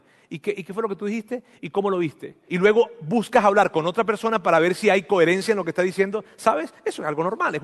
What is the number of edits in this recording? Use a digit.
1